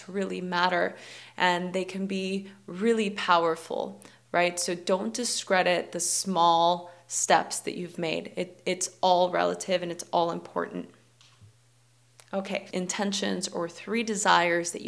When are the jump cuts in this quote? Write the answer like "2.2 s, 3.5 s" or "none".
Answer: 12.7 s